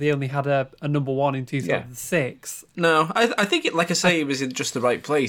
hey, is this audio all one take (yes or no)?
no